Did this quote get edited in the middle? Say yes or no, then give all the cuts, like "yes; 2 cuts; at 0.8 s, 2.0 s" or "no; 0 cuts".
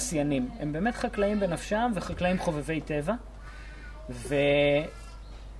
no; 0 cuts